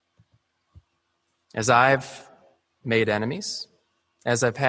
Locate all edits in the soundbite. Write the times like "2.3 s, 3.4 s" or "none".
1.4 s